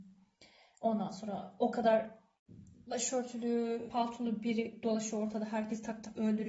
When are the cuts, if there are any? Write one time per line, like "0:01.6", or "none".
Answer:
0:03.9